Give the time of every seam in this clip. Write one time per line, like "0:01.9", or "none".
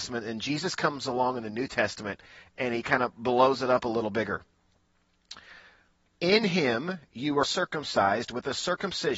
0:06.1
0:07.4